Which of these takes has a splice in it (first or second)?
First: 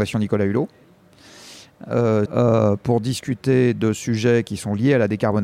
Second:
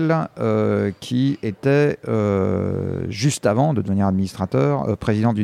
first